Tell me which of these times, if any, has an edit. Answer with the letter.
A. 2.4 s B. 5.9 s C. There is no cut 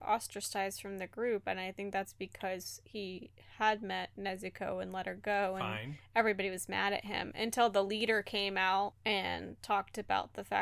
C